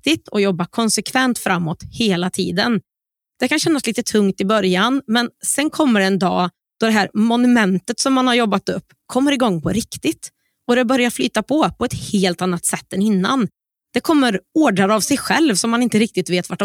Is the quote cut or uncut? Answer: uncut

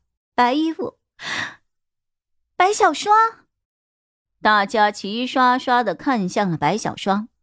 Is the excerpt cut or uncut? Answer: uncut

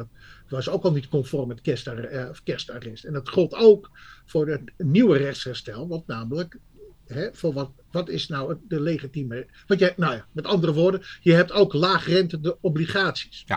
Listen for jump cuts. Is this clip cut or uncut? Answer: uncut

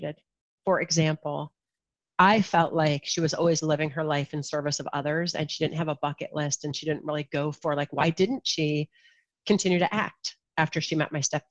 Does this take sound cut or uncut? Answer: uncut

